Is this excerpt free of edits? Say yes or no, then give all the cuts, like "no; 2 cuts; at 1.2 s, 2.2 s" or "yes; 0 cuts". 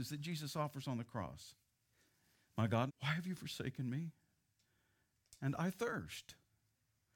no; 1 cut; at 2.9 s